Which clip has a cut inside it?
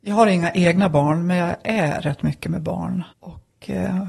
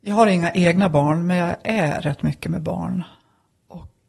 first; 1 cut; at 3.1 s

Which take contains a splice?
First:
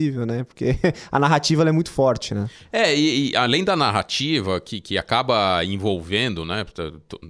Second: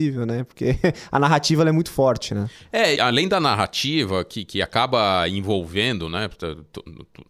second; 1 cut; at 3.0 s

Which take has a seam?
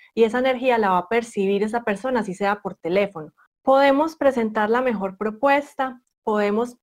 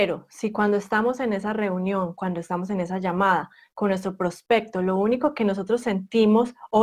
first; 1 cut; at 3.5 s

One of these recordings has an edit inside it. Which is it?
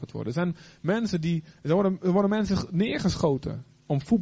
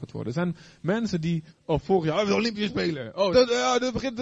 second; 2 cuts; at 1.5 s, 3.3 s

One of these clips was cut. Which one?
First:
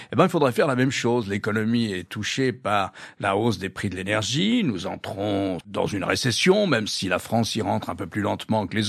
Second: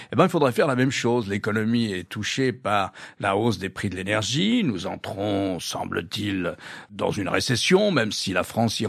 first; 1 cut; at 5.6 s

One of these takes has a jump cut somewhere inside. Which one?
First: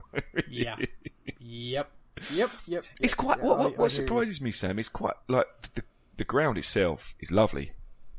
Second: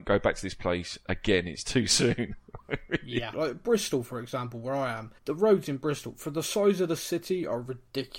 second; 2 cuts; at 3.3 s, 5.2 s

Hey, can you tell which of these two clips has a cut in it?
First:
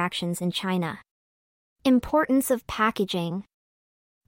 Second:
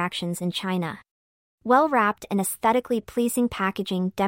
second; 1 cut; at 1.5 s

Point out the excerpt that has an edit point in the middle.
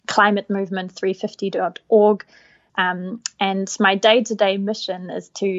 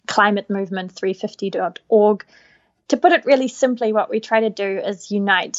first; 1 cut; at 2.7 s

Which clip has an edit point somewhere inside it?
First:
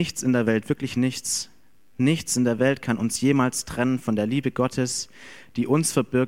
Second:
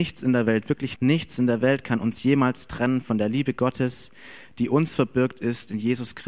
second; 1 cut; at 1.0 s

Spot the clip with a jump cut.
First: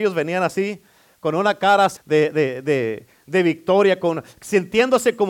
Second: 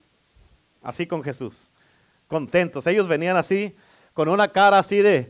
first; 1 cut; at 2.0 s

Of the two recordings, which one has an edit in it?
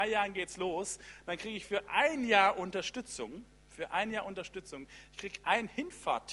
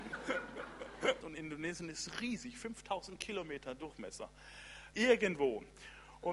second; 2 cuts; at 1.2 s, 4.9 s

